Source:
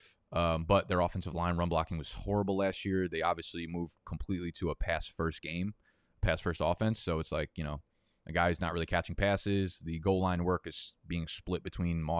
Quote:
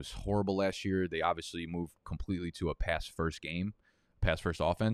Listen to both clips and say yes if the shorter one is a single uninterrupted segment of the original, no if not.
yes